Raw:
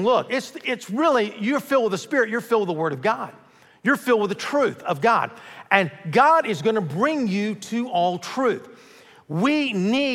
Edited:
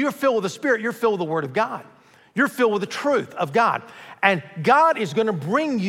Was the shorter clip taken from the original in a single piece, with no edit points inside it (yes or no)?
yes